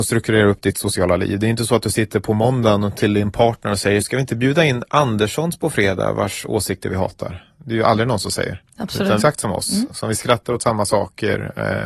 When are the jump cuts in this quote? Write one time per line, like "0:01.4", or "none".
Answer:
0:09.2